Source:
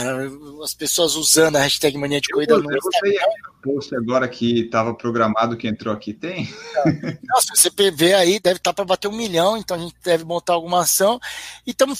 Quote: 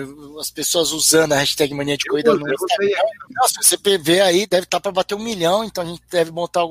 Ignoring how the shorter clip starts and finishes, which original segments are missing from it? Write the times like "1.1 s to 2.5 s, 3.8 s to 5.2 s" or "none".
3.5 s to 7.2 s